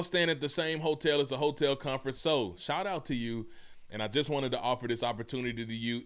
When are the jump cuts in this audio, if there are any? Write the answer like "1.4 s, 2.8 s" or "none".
2.1 s